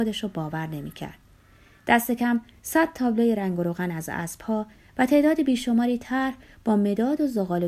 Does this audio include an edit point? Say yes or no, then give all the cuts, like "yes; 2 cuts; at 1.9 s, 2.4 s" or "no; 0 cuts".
no; 0 cuts